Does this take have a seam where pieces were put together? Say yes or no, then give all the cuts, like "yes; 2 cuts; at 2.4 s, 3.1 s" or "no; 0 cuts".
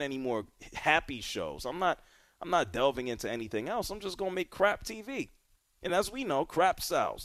no; 0 cuts